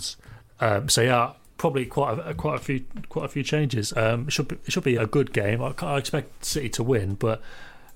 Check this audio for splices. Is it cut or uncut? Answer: cut